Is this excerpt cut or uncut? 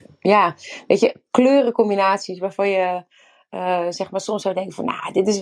uncut